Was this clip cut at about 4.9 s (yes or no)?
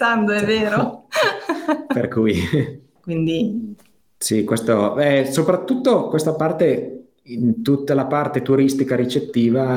no